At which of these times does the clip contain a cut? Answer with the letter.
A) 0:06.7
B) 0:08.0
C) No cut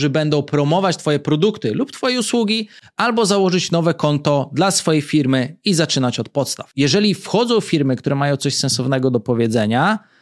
A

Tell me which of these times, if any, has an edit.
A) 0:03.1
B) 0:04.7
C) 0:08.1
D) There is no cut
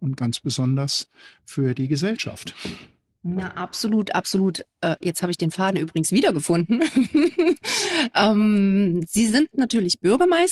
D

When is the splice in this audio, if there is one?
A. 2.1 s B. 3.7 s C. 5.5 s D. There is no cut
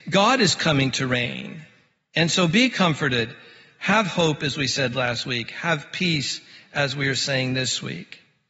D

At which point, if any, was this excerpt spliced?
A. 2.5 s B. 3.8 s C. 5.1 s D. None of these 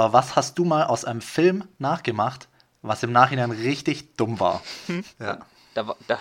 C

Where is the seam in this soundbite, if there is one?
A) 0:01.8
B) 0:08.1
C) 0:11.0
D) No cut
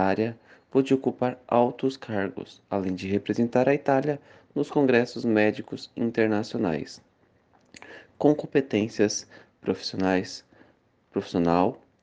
D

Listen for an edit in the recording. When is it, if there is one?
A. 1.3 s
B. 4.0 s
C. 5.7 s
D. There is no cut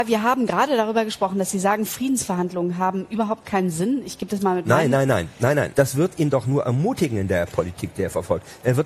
C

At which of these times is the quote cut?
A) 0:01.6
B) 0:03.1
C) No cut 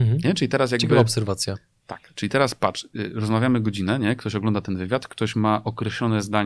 C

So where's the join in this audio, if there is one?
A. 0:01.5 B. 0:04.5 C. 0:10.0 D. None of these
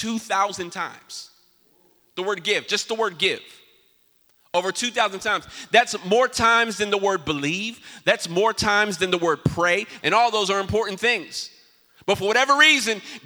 C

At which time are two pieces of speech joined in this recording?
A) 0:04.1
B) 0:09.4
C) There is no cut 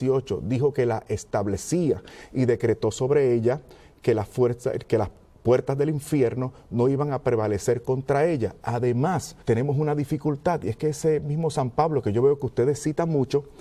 B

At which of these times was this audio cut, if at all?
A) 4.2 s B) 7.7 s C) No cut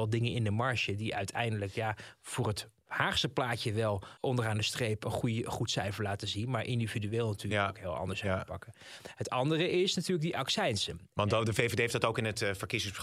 A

